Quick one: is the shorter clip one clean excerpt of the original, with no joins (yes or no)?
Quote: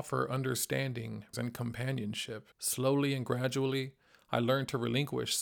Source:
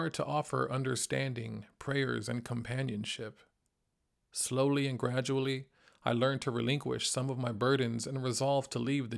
no